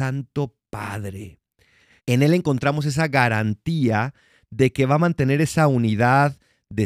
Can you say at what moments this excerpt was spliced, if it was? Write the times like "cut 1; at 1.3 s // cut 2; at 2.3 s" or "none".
cut 1; at 2.0 s